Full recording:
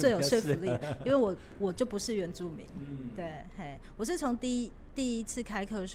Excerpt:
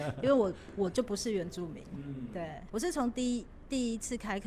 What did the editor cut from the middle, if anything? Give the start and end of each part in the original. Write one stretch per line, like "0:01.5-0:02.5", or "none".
0:03.5-0:04.0